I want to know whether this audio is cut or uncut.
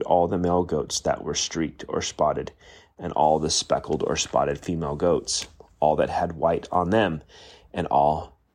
uncut